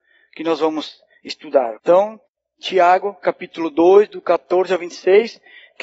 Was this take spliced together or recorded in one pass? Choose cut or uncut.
cut